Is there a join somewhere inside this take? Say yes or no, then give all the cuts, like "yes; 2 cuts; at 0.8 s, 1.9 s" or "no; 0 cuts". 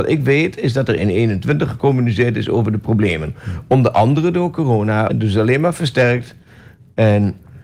yes; 1 cut; at 5.1 s